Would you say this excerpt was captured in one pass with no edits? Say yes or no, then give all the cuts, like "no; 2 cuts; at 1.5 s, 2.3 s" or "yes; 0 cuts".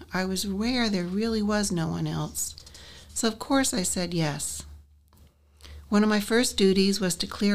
yes; 0 cuts